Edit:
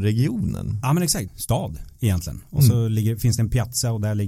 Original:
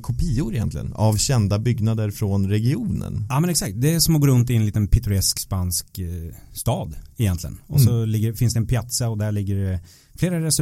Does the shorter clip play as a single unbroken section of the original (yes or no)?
no